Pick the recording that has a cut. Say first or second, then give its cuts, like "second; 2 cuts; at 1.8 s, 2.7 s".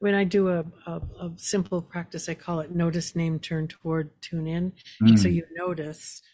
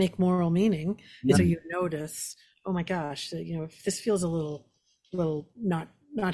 second; 1 cut; at 1.3 s